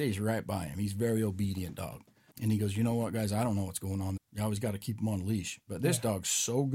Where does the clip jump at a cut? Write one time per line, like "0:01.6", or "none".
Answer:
0:02.3
0:04.2